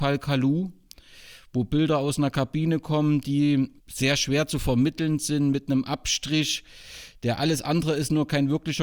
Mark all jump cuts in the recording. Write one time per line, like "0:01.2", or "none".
0:03.8